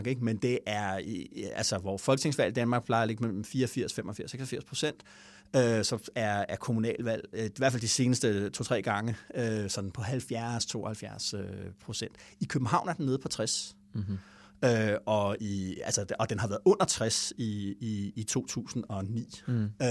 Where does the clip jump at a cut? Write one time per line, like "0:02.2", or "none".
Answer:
none